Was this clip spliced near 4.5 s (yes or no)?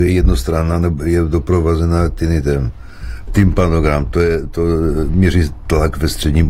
no